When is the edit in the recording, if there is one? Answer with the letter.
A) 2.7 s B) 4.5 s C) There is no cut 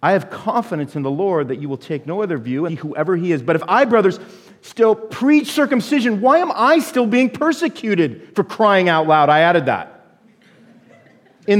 A